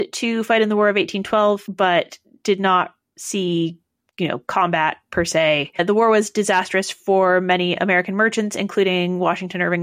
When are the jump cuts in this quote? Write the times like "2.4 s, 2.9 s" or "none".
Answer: none